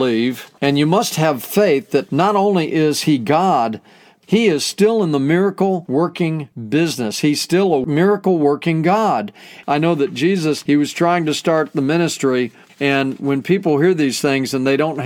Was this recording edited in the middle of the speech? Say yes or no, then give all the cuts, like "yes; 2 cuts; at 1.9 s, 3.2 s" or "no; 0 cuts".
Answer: yes; 1 cut; at 9.6 s